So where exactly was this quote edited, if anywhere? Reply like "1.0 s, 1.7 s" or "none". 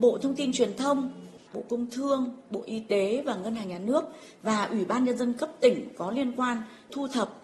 1.5 s